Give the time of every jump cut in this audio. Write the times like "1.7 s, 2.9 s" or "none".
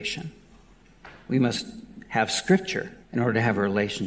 3.0 s